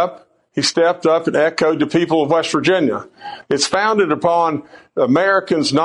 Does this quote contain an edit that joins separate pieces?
yes; 1 cut; at 3.4 s

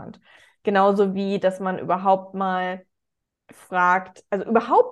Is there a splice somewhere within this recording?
no; 0 cuts

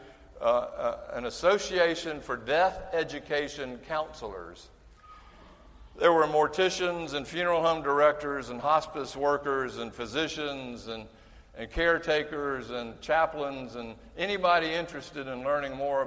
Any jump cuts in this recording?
no; 0 cuts

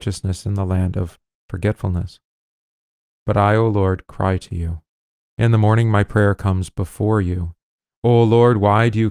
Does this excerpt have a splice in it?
no; 0 cuts

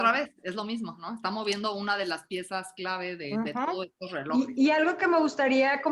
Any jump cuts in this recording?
no; 0 cuts

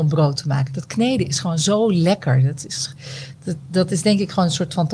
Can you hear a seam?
no; 0 cuts

